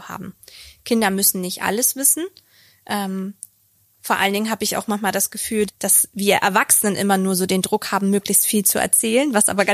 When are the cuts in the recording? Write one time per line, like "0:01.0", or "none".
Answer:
0:05.7